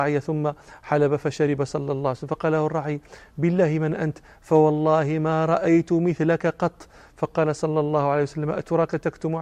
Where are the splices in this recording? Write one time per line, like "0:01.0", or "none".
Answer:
none